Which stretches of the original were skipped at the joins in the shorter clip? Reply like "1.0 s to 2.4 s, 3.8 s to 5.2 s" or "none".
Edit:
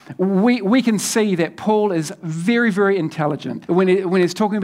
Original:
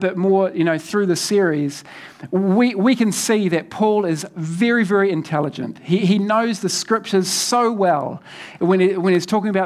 5.8 s to 8.6 s